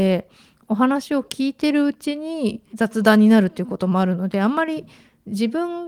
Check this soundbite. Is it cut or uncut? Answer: cut